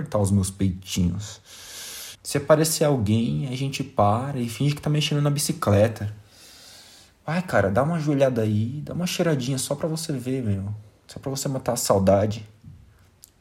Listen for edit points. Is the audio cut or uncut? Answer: cut